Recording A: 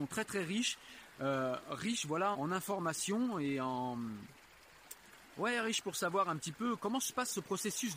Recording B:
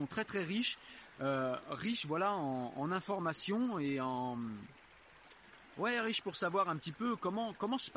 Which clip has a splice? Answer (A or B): A